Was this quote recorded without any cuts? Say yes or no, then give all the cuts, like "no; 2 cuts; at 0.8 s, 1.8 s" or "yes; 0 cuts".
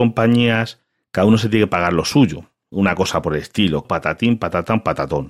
no; 1 cut; at 3.8 s